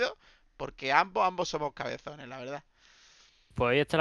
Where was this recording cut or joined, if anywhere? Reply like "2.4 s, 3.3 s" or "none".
none